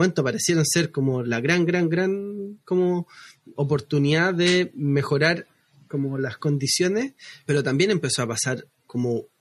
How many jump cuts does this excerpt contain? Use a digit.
2